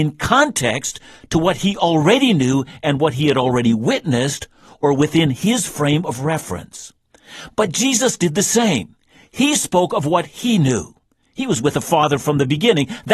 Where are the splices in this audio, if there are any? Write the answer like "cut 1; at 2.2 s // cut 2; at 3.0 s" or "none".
none